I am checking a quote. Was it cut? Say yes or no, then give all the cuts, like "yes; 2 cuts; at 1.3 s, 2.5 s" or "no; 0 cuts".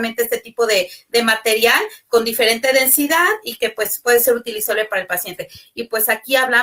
yes; 1 cut; at 5.7 s